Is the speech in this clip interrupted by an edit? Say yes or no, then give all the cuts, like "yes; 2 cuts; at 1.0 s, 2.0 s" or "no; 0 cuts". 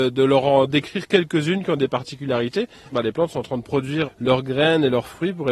yes; 2 cuts; at 2.9 s, 4.0 s